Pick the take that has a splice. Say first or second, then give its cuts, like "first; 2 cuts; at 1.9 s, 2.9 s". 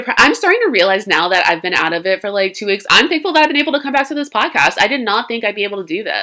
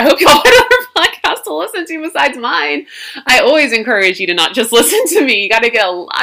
first; 1 cut; at 2.9 s